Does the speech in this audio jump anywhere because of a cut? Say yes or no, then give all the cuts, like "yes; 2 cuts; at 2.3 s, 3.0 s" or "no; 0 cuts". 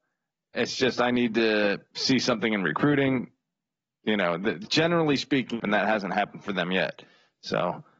yes; 1 cut; at 5.6 s